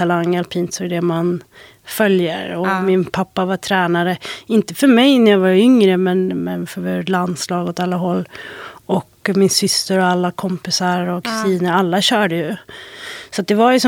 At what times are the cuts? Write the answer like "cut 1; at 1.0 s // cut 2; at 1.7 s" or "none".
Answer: none